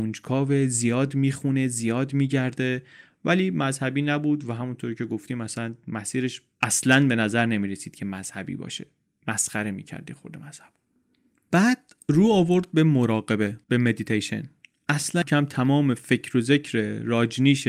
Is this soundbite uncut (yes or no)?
no